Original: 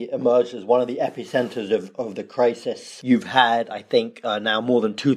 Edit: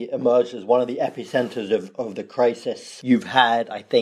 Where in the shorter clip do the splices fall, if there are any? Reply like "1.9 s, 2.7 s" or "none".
none